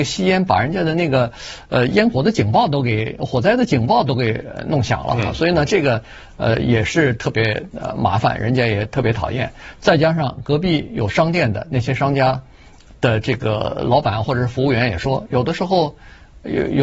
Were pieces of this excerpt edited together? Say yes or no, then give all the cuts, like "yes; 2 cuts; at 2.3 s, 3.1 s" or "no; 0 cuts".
no; 0 cuts